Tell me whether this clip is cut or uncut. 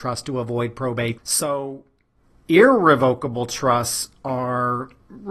cut